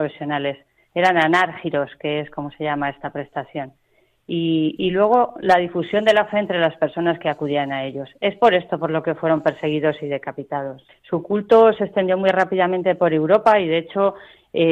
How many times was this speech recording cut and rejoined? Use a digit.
1